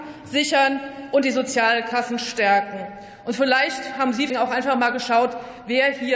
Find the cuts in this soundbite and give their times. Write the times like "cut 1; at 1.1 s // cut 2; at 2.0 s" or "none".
cut 1; at 4.3 s